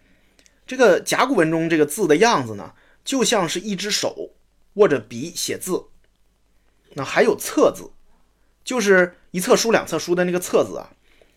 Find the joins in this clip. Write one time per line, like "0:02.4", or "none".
none